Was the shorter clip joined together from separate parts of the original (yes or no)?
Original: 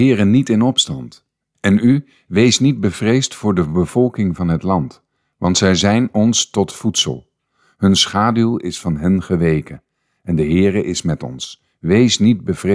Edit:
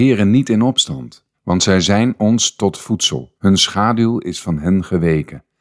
yes